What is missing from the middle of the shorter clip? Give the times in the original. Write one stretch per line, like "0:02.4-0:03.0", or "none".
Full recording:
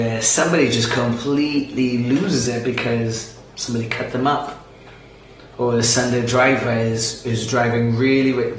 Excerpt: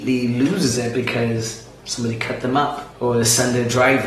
0:04.6-0:05.5